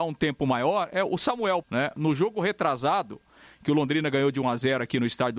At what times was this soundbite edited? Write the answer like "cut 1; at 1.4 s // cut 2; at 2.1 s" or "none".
cut 1; at 1.6 s